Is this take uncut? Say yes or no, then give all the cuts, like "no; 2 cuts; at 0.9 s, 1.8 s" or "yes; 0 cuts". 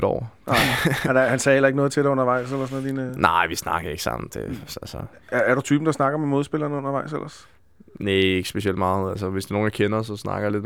yes; 0 cuts